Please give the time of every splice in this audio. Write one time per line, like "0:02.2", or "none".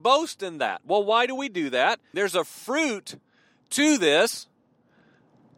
0:02.1